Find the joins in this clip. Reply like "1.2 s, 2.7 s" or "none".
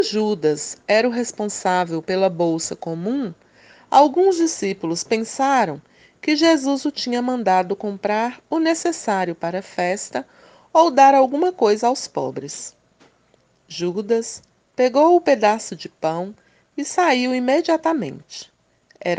none